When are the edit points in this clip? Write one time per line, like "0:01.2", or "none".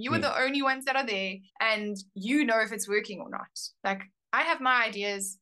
0:01.5